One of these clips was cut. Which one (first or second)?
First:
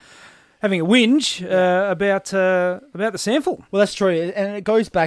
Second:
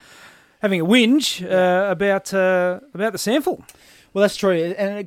first